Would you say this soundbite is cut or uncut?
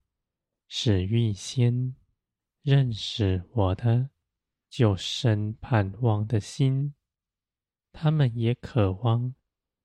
cut